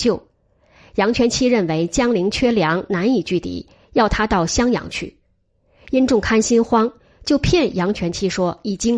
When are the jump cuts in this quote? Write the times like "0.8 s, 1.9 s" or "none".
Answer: none